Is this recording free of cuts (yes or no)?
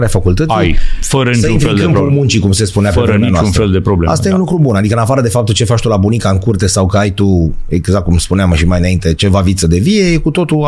yes